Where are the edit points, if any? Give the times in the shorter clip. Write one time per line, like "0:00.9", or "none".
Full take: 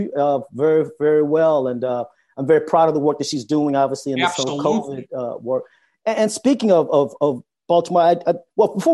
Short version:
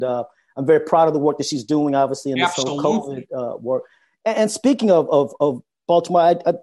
none